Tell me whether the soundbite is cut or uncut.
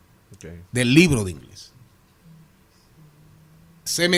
uncut